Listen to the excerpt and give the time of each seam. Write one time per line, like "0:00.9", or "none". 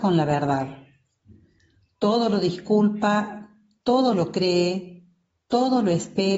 none